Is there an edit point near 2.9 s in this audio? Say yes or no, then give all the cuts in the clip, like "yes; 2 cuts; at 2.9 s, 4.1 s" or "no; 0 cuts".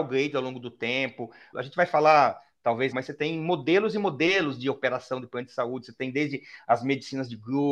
yes; 2 cuts; at 1.5 s, 2.9 s